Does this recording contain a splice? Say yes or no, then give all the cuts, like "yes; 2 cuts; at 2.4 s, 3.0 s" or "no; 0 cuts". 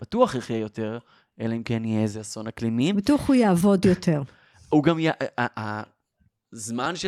no; 0 cuts